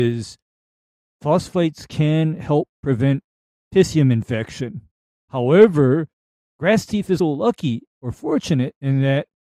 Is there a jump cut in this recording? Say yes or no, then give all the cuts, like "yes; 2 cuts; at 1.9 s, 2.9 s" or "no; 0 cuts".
yes; 2 cuts; at 5.1 s, 7.2 s